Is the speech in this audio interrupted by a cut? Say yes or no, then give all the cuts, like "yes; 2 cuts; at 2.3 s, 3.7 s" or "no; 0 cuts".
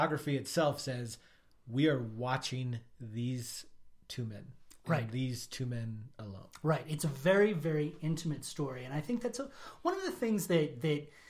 no; 0 cuts